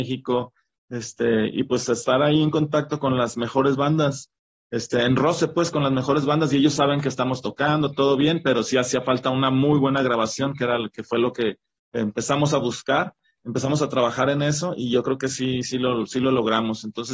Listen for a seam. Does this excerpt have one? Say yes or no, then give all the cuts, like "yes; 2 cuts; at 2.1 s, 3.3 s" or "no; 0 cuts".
no; 0 cuts